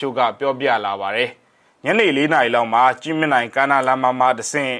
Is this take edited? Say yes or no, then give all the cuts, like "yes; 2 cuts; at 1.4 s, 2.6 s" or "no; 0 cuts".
no; 0 cuts